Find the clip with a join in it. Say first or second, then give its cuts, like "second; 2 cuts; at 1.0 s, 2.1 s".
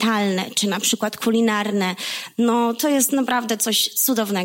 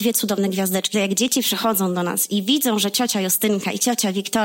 second; 1 cut; at 0.9 s